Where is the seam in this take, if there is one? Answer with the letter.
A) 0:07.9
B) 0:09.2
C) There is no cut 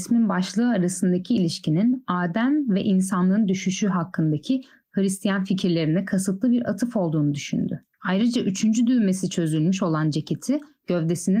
A